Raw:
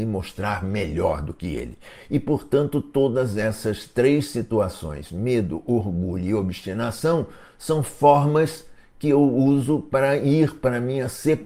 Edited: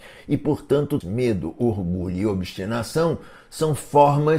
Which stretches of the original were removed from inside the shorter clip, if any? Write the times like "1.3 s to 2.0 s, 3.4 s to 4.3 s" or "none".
2.8 s to 5.1 s